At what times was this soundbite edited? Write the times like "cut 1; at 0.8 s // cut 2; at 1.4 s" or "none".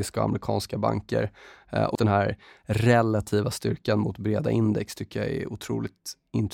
cut 1; at 2.0 s